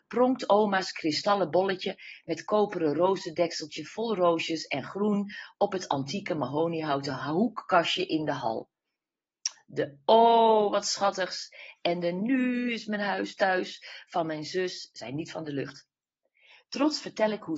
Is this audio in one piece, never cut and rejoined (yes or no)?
yes